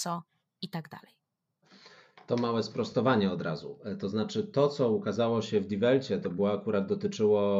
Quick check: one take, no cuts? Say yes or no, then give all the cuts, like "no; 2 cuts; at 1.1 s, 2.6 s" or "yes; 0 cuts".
yes; 0 cuts